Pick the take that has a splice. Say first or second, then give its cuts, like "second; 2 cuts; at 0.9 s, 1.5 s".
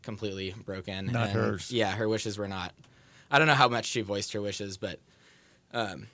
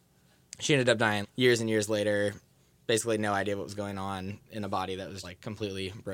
second; 2 cuts; at 1.2 s, 5.2 s